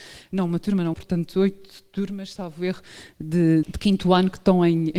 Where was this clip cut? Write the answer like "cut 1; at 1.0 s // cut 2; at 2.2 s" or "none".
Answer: cut 1; at 0.9 s // cut 2; at 3.6 s